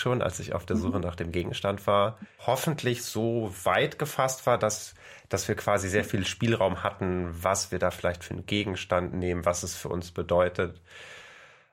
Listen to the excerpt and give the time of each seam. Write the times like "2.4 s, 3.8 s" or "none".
2.4 s